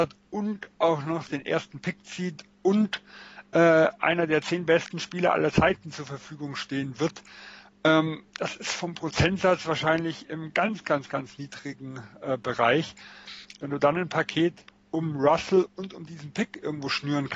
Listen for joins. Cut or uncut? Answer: cut